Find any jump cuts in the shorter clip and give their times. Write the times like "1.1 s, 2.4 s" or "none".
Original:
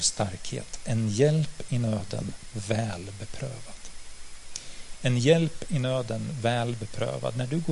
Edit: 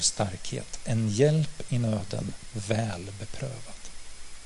none